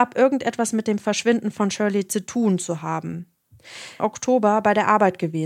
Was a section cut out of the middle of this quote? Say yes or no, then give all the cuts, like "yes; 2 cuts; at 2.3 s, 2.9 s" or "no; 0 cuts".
yes; 1 cut; at 4.0 s